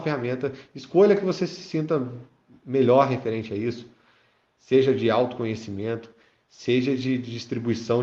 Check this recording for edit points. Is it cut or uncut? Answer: uncut